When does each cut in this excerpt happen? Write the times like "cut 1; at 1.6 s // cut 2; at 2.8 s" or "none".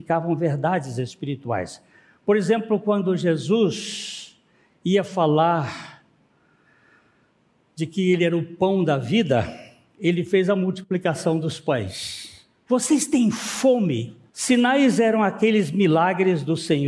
cut 1; at 12.7 s // cut 2; at 14.3 s